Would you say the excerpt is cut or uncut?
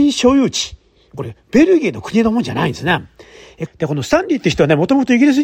cut